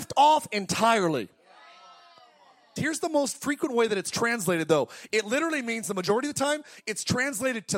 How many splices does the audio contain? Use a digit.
1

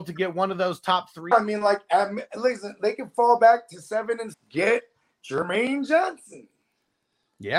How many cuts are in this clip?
2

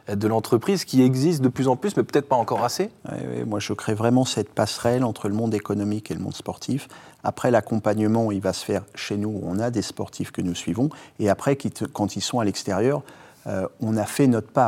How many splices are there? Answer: 0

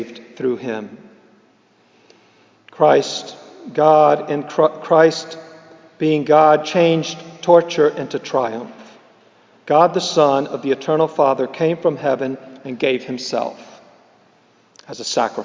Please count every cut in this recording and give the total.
0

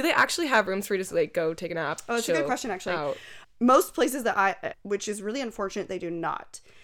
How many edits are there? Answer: 2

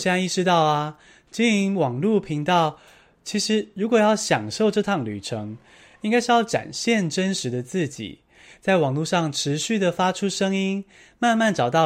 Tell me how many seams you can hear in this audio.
0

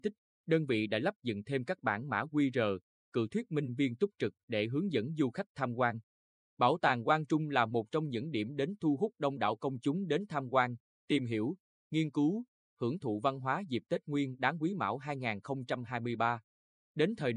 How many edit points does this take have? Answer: 0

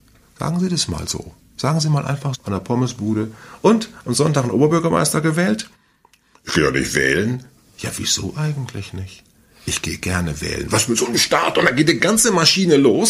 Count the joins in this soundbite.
1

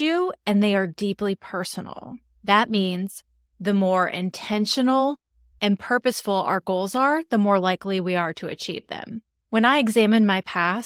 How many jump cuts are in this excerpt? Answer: 1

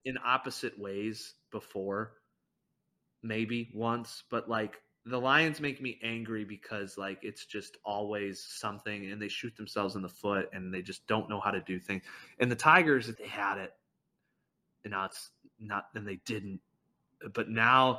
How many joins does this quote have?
1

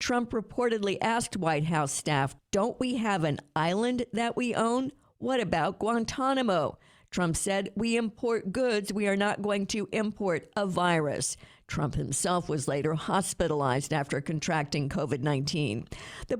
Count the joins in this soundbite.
1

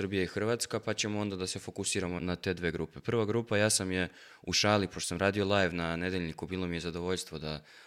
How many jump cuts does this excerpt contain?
1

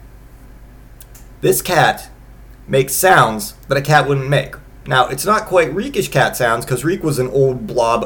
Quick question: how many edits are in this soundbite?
1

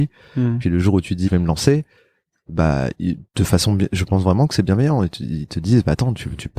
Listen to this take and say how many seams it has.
1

